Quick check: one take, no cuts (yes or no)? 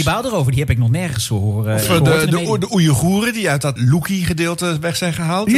no